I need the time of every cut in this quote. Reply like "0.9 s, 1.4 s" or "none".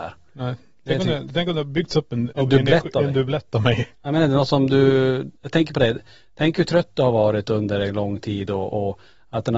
2.3 s